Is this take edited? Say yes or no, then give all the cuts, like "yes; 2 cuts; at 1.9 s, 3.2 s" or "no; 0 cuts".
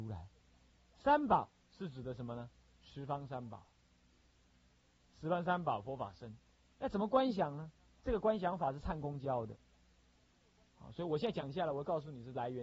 no; 0 cuts